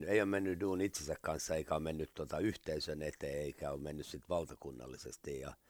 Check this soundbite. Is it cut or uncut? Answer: uncut